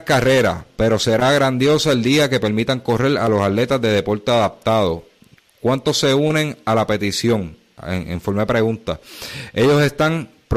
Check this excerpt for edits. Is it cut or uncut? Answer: uncut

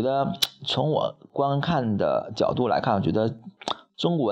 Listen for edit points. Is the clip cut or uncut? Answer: uncut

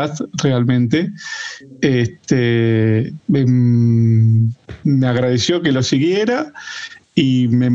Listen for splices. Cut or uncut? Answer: cut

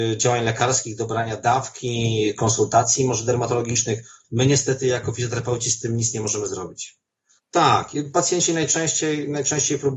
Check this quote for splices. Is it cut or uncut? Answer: cut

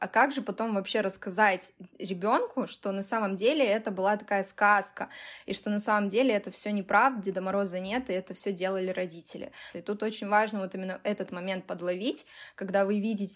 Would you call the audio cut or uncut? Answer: cut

